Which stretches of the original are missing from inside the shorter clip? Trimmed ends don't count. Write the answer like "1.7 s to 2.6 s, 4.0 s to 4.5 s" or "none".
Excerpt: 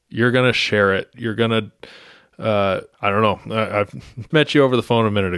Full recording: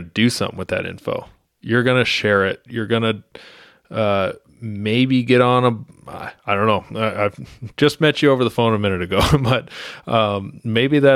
4.5 s to 6.4 s, 7.8 s to 8.0 s